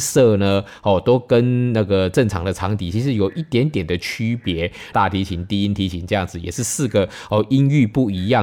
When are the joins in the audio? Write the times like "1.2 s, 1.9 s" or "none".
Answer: 4.9 s